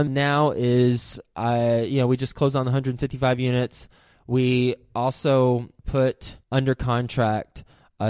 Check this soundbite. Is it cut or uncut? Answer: cut